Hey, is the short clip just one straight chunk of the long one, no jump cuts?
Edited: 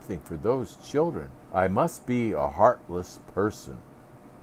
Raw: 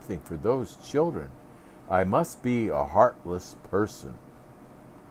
no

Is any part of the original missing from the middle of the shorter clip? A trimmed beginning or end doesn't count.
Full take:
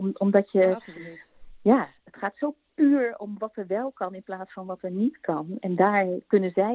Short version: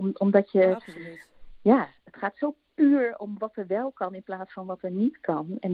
no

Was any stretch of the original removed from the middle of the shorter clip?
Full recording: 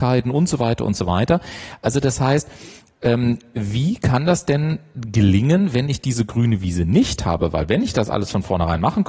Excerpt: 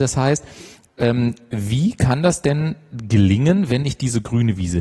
no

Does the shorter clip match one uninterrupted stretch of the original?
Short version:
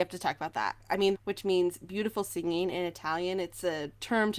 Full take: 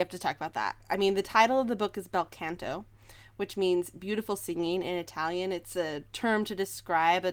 no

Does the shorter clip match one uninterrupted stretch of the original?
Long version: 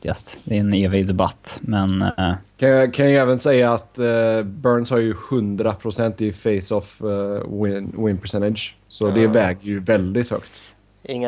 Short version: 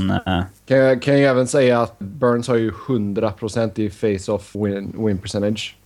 no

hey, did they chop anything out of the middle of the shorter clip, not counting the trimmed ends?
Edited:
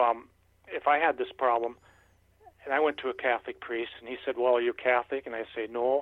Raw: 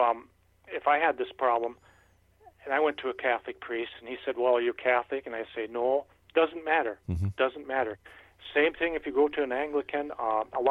no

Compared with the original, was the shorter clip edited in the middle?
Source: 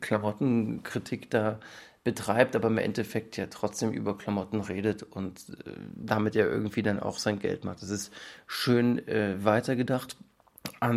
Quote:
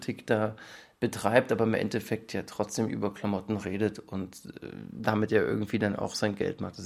no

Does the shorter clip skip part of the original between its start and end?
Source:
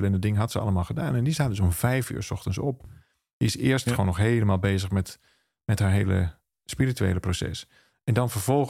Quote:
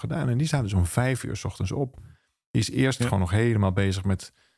no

